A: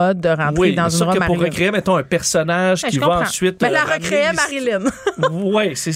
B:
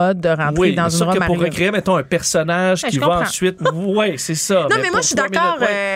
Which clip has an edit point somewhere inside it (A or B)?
B